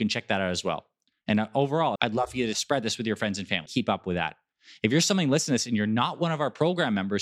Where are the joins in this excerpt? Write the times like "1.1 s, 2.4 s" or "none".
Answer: 2.0 s, 3.7 s